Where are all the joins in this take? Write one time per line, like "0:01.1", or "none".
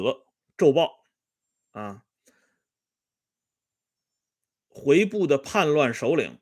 none